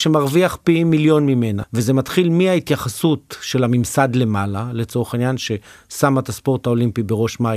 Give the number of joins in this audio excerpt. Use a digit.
1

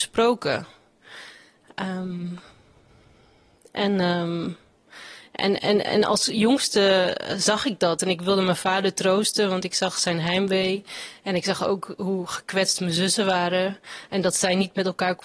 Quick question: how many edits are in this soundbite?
0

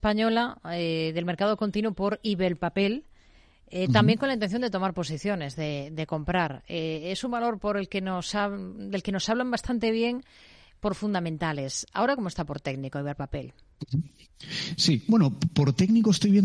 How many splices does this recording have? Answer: 0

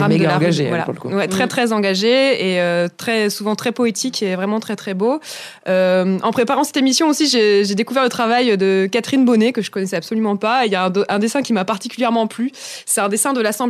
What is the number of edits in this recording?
0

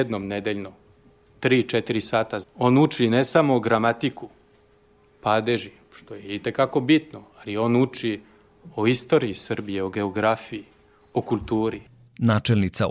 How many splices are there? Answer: 1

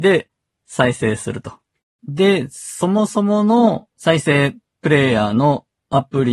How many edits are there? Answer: 2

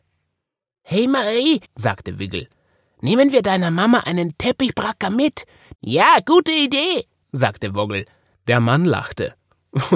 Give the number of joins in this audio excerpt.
3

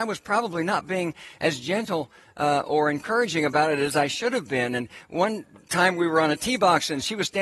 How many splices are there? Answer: 0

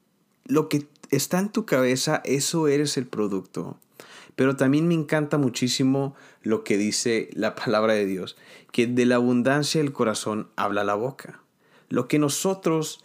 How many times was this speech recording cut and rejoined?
1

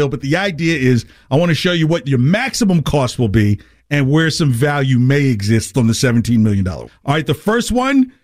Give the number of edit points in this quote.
2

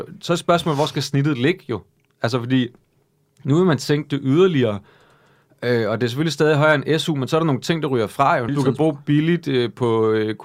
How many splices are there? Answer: 1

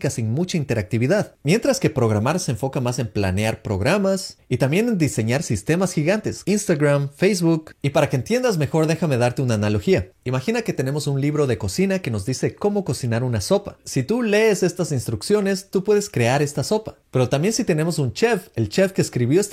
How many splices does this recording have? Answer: 1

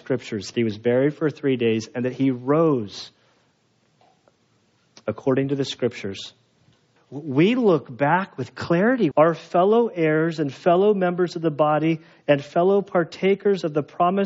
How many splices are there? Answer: 2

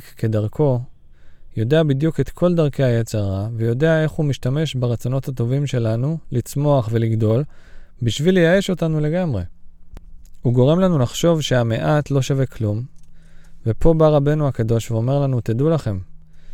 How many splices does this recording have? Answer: 0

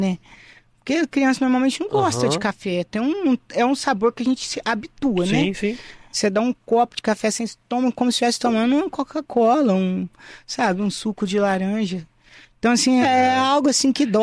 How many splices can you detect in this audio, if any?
2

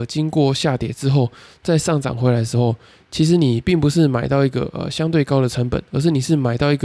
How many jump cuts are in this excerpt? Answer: 0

